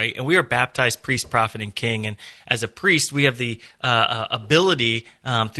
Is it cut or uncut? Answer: uncut